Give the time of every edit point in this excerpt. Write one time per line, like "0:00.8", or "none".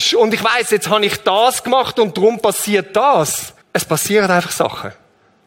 0:03.6